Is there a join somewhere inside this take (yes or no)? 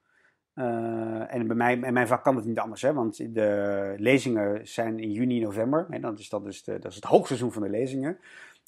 no